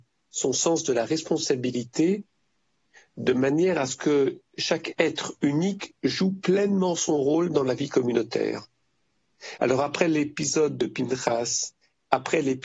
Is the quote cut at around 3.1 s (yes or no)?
no